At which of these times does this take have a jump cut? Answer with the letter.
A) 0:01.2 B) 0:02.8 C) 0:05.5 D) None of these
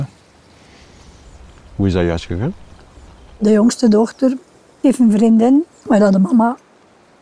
D